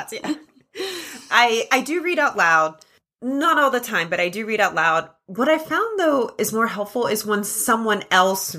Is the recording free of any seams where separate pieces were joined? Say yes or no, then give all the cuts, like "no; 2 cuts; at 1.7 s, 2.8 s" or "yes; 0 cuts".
yes; 0 cuts